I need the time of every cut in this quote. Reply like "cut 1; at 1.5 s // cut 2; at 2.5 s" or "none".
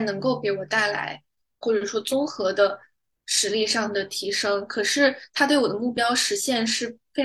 cut 1; at 1.6 s